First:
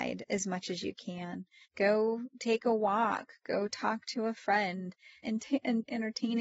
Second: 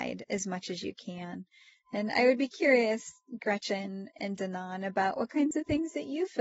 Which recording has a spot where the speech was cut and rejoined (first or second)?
first